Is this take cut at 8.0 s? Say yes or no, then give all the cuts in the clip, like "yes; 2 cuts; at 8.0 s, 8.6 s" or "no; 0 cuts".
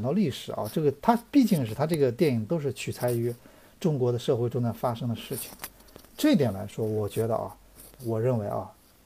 yes; 1 cut; at 8.0 s